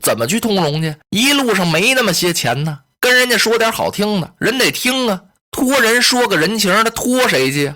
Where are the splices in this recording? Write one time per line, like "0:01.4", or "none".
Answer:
0:01.0